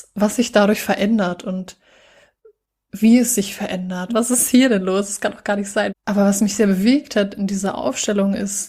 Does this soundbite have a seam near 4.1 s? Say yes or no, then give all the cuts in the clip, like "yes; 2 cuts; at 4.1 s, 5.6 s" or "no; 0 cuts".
yes; 2 cuts; at 4.1 s, 5.9 s